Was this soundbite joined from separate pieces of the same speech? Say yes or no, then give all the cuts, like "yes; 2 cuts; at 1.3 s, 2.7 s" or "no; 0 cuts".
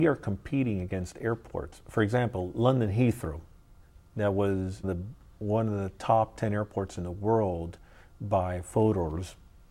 yes; 1 cut; at 4.8 s